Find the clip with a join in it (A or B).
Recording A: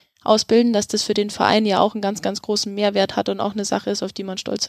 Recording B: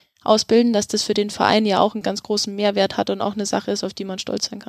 B